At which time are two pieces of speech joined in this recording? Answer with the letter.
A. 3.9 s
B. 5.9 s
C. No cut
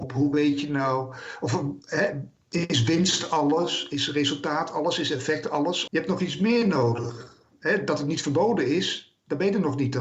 B